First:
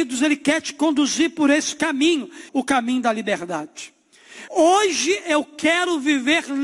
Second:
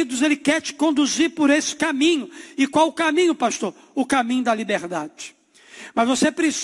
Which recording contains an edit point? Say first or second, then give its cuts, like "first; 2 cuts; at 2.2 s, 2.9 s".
first; 2 cuts; at 2.5 s, 4.5 s